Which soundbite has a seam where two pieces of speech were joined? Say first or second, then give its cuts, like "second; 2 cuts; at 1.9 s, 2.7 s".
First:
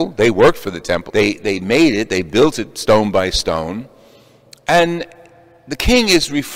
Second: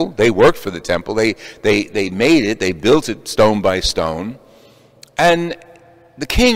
first; 1 cut; at 1.1 s